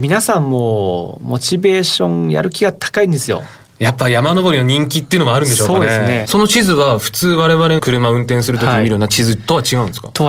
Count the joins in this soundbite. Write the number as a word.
two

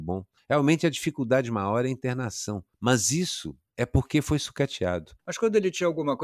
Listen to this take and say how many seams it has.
two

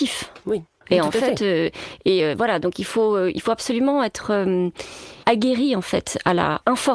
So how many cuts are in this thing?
zero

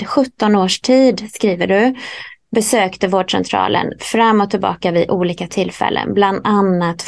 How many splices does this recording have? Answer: zero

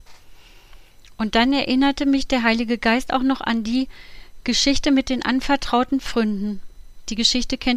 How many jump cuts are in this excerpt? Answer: zero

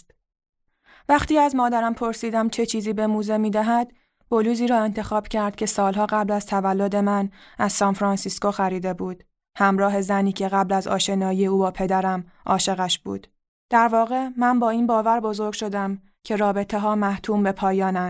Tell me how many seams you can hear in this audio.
one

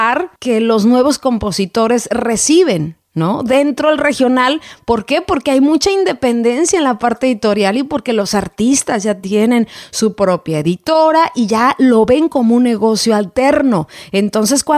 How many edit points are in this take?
zero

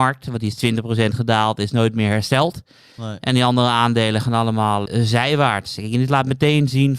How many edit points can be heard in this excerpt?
one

